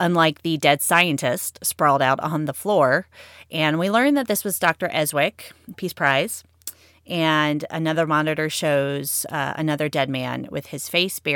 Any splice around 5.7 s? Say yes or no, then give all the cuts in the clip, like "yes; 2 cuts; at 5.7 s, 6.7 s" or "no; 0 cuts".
yes; 1 cut; at 5.7 s